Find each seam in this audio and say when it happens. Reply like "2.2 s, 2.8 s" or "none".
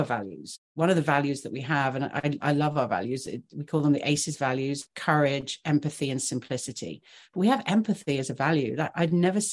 4.8 s